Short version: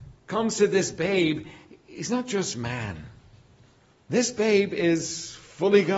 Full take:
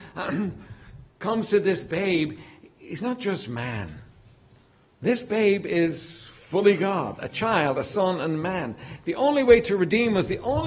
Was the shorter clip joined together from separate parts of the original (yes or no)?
no